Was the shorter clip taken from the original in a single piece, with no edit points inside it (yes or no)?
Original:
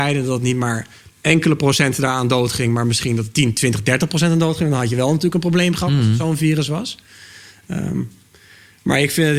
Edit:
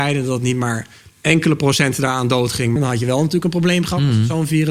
no